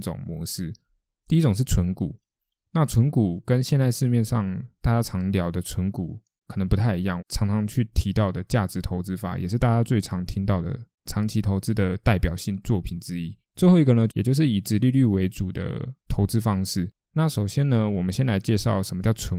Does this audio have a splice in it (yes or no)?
yes